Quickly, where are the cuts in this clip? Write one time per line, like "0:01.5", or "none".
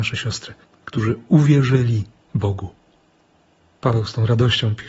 none